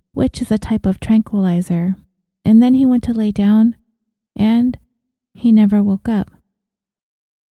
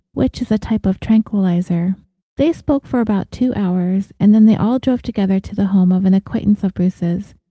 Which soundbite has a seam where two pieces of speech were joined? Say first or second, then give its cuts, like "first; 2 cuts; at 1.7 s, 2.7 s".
second; 1 cut; at 2.2 s